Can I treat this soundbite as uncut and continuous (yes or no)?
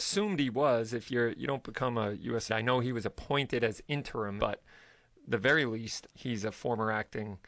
no